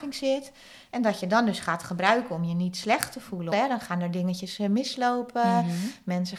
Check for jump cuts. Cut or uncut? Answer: cut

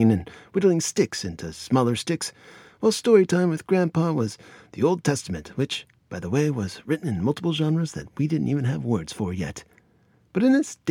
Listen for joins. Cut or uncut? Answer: uncut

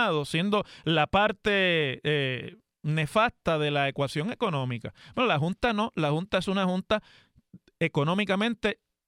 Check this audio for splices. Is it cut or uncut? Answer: uncut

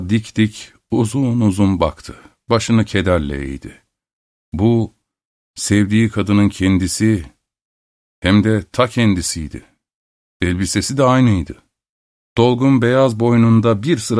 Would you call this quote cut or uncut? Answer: uncut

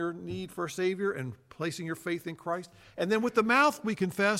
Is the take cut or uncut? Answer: uncut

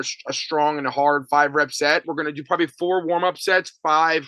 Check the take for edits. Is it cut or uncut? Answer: cut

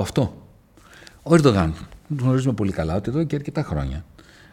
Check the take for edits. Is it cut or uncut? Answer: uncut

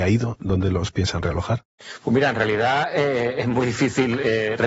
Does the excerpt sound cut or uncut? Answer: uncut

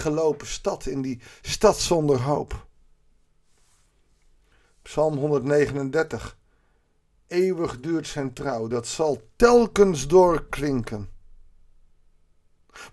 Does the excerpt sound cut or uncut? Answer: uncut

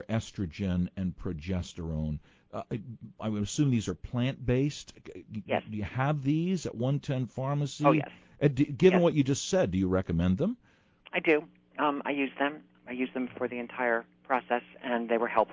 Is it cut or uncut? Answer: cut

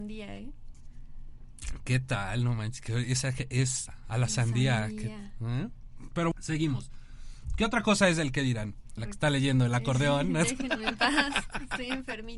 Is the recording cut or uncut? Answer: cut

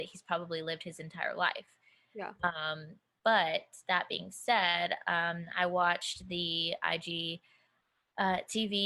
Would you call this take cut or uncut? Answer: uncut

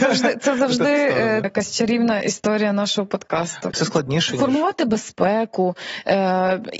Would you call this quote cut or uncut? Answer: cut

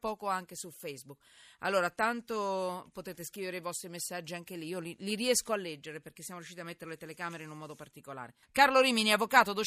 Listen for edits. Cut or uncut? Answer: cut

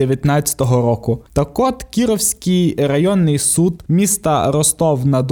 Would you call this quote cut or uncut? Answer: cut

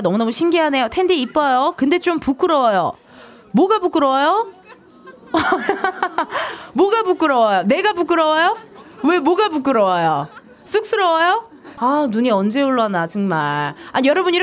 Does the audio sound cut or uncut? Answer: cut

